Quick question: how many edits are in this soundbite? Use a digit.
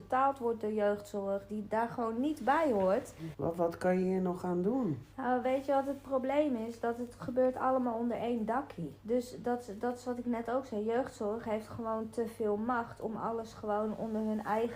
2